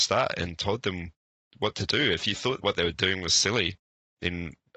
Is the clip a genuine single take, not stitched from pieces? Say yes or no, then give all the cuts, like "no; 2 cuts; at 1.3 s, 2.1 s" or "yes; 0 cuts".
yes; 0 cuts